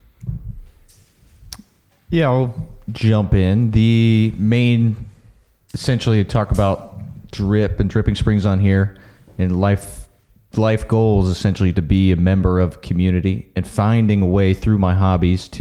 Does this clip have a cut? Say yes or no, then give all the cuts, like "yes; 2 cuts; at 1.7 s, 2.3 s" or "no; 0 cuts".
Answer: no; 0 cuts